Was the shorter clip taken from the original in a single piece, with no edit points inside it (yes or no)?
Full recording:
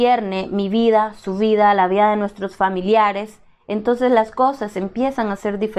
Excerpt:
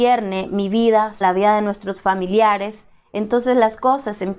no